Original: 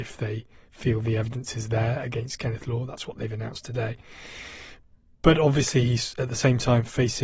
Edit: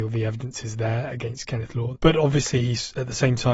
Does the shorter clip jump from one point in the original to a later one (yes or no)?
yes